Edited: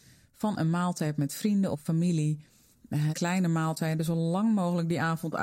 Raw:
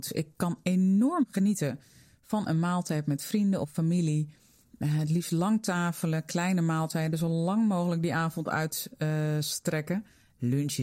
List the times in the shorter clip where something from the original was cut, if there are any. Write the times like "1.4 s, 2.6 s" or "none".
3.1 s